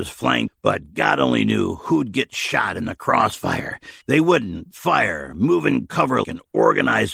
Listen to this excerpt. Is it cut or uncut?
cut